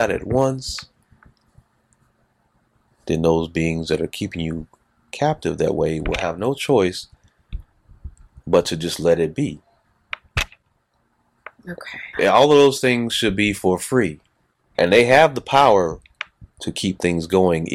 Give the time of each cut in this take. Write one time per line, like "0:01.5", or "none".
0:12.1
0:14.7